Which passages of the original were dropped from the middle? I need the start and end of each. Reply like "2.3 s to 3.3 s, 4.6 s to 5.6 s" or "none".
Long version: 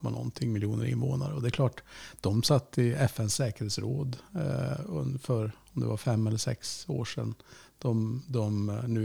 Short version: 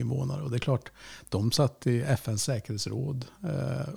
none